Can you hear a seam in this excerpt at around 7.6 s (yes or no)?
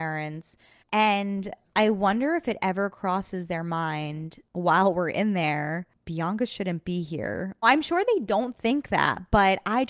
yes